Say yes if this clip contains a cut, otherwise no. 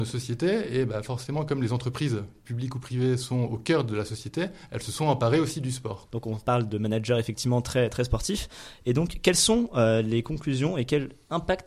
yes